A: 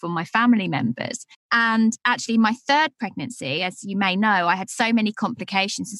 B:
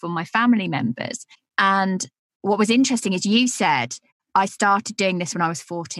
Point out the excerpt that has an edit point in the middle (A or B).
A